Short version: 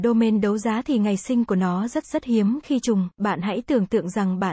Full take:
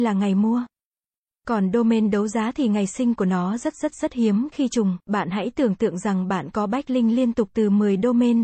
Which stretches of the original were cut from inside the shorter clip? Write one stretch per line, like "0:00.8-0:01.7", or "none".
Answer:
0:03.7-0:03.9